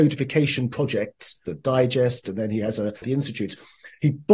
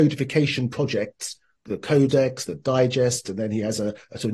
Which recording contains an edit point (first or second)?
first